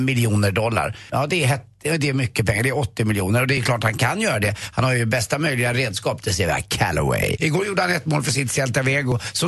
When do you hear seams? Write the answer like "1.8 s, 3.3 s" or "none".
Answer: 1.1 s, 7.4 s